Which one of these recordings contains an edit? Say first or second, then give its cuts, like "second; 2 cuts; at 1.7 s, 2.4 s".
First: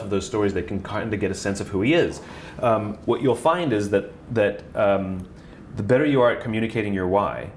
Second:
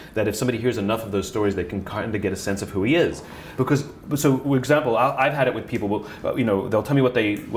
second; 1 cut; at 3.6 s